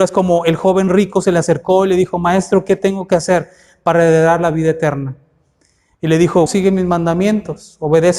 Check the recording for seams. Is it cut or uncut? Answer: cut